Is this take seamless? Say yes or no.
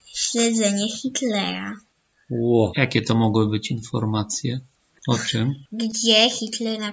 no